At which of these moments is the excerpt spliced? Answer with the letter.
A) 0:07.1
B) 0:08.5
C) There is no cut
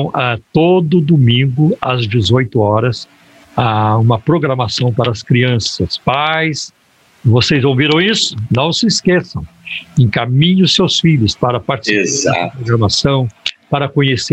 C